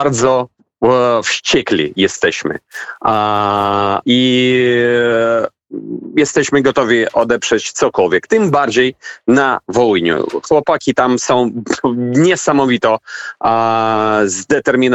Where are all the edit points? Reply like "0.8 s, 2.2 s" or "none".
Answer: 4.0 s